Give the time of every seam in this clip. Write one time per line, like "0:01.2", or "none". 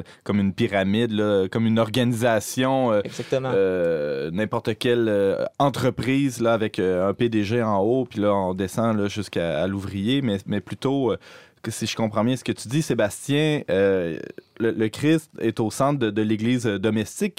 none